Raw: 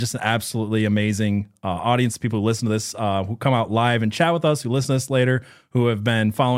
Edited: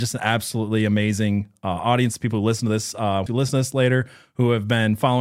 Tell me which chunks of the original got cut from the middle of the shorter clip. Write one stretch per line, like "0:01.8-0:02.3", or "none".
0:03.3-0:04.6